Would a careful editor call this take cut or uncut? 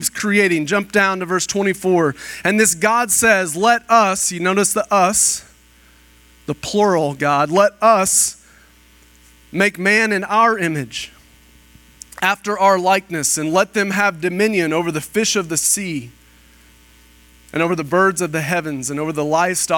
uncut